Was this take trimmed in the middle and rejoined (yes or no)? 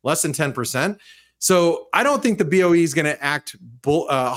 no